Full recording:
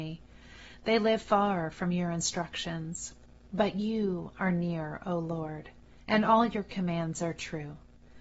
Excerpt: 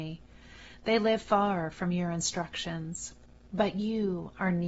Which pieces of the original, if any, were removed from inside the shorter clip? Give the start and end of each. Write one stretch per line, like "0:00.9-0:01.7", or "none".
none